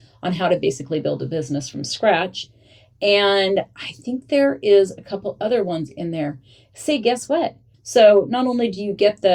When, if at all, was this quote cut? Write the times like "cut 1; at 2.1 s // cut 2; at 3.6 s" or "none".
cut 1; at 7.7 s